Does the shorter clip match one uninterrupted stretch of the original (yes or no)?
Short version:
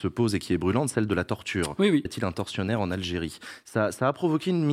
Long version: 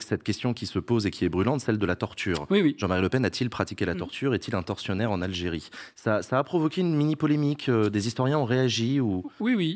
no